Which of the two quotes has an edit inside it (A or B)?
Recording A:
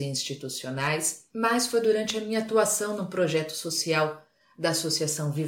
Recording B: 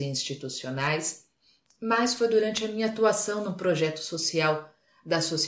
A